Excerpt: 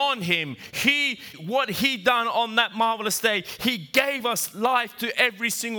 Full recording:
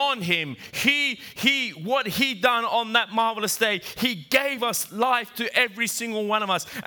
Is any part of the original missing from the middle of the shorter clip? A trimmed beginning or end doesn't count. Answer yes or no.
yes